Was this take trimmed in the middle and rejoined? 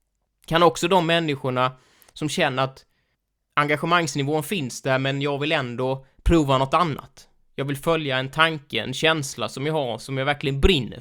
no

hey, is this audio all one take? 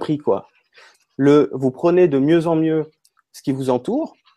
no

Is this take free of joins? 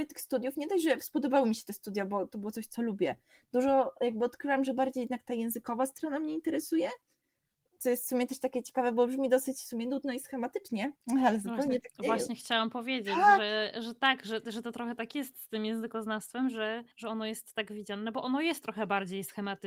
no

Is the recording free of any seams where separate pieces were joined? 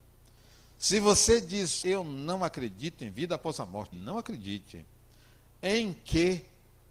no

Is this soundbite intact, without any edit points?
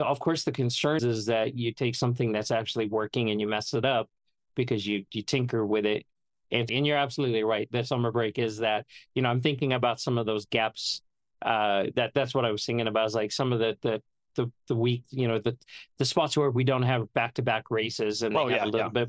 no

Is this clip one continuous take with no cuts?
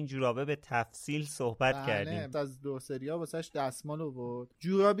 no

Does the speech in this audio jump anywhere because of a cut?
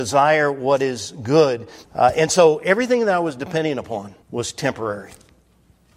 yes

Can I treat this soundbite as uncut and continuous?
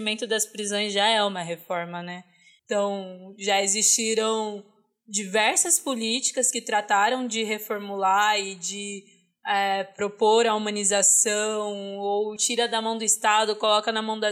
no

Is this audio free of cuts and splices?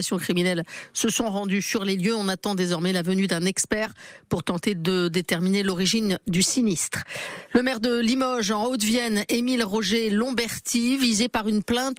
yes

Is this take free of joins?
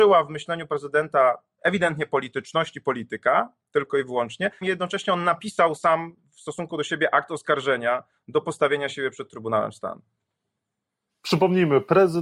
no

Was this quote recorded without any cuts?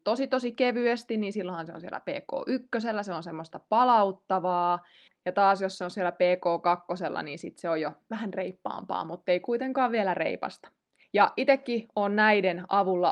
no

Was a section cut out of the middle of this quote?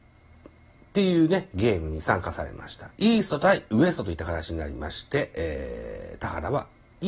yes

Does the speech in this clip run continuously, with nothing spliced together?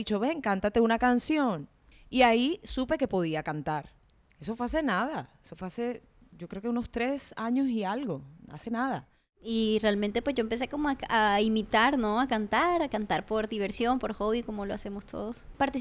yes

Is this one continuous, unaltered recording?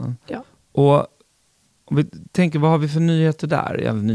yes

